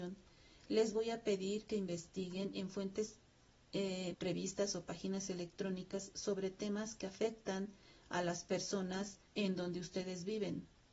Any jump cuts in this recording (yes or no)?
yes